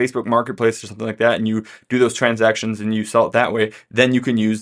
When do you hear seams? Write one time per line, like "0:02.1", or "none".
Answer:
none

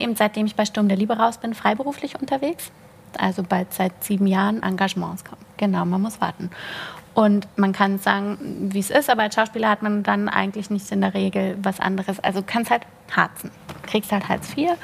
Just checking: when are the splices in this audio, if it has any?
0:04.6
0:07.5

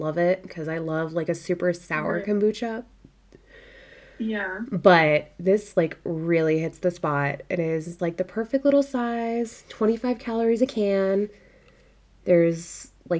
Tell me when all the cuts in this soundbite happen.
0:08.0

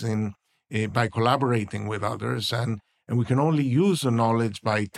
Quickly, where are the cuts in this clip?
none

